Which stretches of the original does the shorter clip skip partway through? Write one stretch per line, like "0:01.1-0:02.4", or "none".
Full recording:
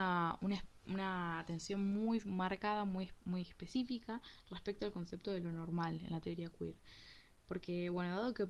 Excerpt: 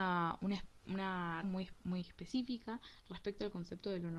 0:01.4-0:02.8